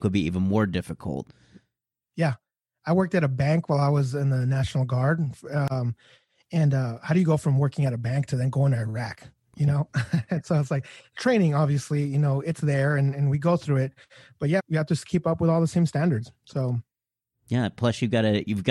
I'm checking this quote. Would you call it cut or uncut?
cut